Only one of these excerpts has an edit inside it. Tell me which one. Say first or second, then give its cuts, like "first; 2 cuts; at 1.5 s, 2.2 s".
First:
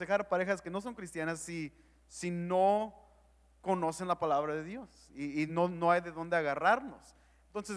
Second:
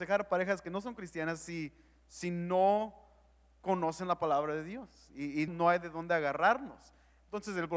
second; 1 cut; at 5.5 s